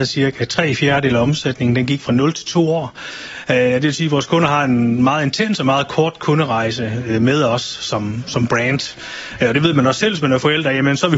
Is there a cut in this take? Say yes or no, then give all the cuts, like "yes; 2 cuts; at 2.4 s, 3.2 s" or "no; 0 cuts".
no; 0 cuts